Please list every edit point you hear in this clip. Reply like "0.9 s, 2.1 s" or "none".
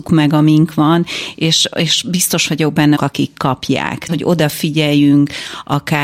3.0 s, 4.1 s